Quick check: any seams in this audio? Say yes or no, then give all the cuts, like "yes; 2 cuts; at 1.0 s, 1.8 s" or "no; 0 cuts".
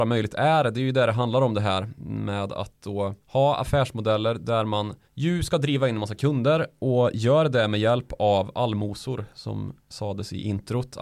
yes; 2 cuts; at 3.2 s, 5.0 s